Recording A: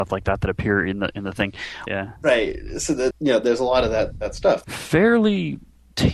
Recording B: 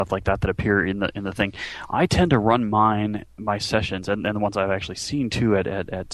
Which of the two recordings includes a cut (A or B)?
A